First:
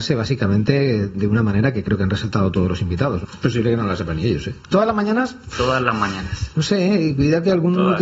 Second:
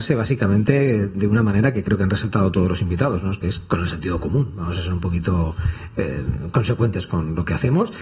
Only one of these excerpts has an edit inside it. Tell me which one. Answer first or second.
first